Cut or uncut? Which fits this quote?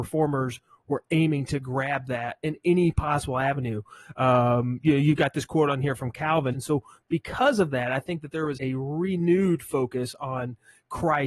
cut